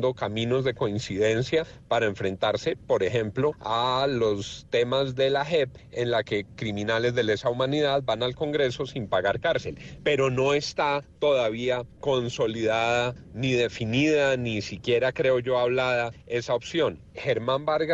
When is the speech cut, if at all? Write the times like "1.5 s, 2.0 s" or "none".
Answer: 17.0 s